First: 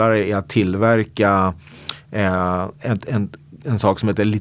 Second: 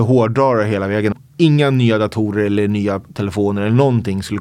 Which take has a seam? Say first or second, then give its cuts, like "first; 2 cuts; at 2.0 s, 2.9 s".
second; 1 cut; at 1.1 s